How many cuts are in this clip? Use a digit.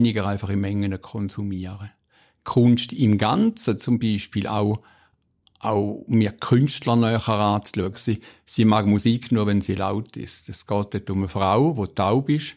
1